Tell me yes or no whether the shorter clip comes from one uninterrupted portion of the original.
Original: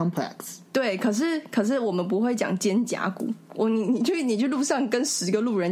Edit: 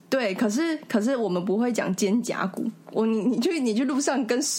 yes